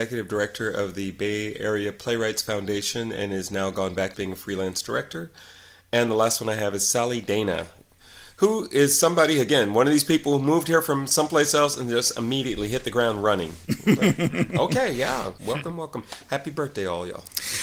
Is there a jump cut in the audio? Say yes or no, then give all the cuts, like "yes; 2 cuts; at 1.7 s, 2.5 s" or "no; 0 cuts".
yes; 2 cuts; at 4.1 s, 15.4 s